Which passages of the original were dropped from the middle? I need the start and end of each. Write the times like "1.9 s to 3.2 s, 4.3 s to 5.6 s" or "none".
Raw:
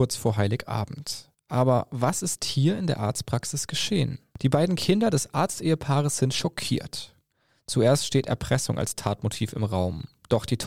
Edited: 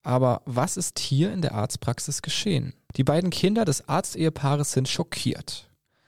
none